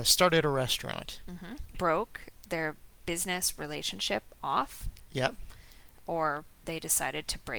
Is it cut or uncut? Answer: cut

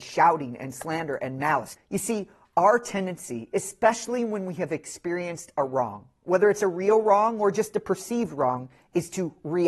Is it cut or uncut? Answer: cut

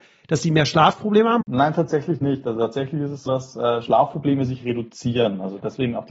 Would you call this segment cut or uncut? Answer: cut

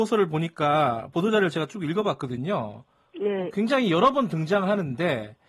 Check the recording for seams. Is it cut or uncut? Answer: uncut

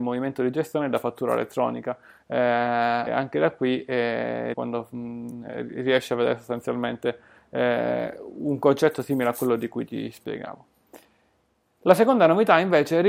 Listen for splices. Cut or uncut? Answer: cut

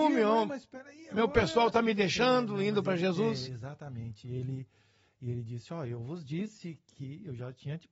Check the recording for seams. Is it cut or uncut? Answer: uncut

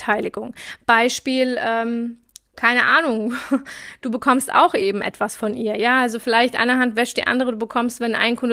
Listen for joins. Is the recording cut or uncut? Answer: uncut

